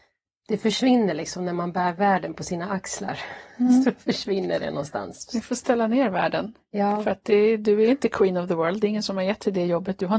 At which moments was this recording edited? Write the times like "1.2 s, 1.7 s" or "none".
none